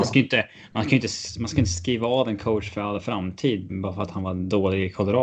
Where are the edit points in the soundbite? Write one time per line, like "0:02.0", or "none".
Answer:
0:03.7